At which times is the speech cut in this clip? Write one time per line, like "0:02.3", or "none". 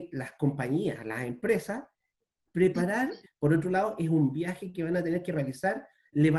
0:03.2